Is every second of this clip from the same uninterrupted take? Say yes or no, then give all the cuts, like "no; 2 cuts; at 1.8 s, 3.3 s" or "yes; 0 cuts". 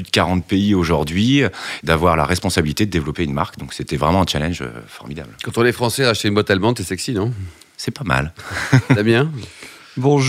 no; 1 cut; at 1.8 s